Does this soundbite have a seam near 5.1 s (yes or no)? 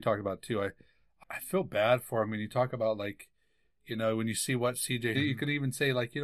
yes